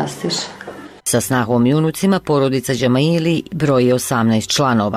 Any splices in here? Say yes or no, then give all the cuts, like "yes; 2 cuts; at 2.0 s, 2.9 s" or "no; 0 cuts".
yes; 1 cut; at 1.0 s